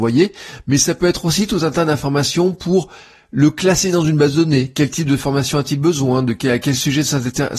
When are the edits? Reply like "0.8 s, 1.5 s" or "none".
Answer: none